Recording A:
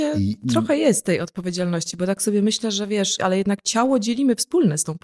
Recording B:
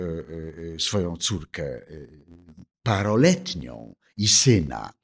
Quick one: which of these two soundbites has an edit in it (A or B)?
A